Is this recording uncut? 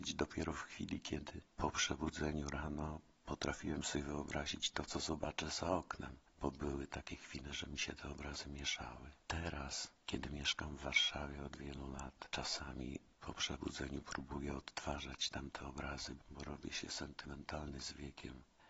yes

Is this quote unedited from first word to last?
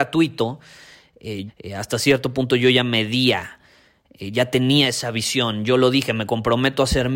no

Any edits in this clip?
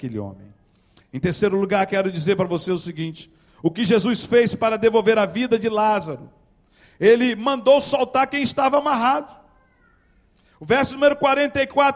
no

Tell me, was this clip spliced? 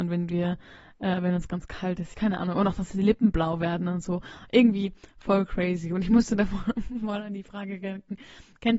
yes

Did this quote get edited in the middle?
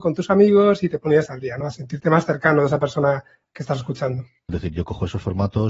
yes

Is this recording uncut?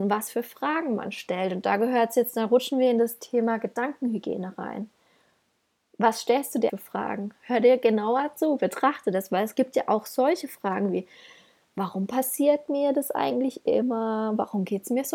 no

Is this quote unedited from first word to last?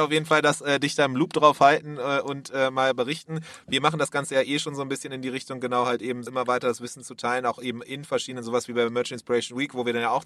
no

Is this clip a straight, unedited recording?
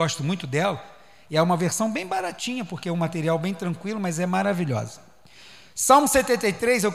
yes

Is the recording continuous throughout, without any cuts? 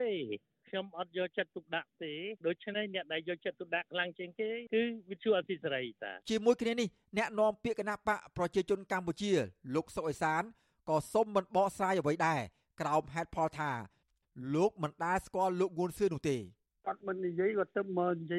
no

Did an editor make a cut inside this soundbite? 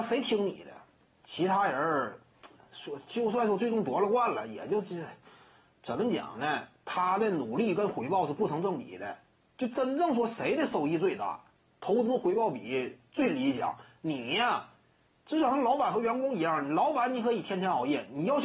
yes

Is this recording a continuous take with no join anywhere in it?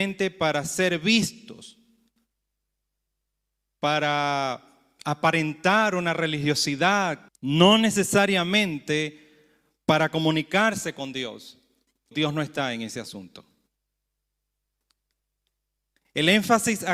no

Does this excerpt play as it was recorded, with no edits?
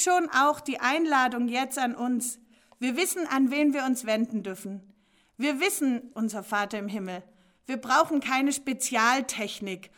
no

